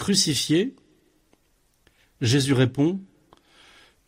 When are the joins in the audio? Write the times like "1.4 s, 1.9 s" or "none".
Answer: none